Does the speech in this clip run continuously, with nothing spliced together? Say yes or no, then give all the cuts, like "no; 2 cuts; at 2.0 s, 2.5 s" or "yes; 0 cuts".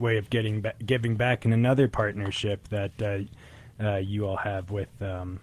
yes; 0 cuts